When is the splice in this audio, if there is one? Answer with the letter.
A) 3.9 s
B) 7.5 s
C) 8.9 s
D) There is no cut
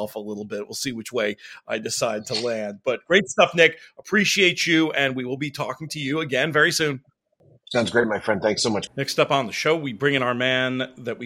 C